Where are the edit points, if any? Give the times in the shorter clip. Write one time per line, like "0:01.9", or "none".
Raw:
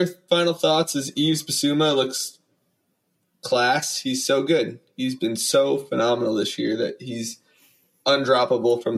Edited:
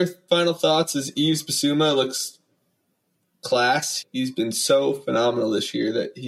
0:04.0